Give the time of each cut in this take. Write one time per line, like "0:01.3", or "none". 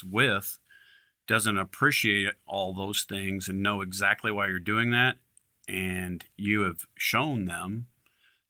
none